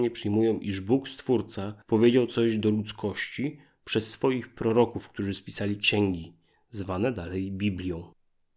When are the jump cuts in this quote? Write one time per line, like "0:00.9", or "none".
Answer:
none